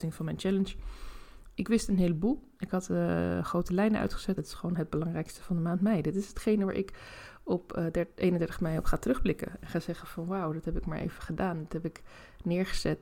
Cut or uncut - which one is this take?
cut